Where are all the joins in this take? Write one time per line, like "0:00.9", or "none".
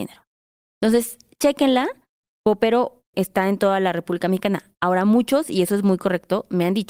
0:03.1